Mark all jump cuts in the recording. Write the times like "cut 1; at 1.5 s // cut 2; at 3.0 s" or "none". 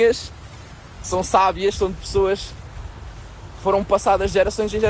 none